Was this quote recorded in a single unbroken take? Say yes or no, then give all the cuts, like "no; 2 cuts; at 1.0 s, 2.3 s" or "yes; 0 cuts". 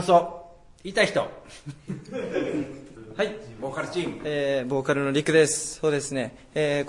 yes; 0 cuts